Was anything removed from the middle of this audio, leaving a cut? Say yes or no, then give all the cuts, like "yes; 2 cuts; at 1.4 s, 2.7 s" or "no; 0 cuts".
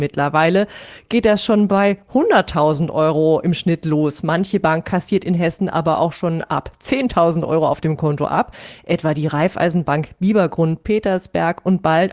no; 0 cuts